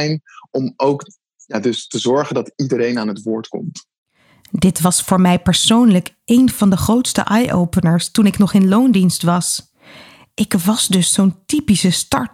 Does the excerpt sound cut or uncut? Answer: uncut